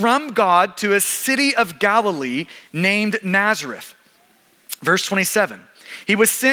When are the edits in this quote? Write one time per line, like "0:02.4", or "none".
none